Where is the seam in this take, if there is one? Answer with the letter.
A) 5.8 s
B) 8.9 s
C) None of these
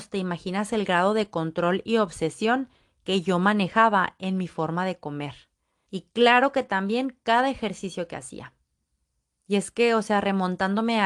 A